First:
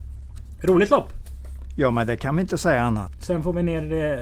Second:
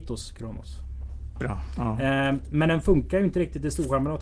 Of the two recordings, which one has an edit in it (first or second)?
second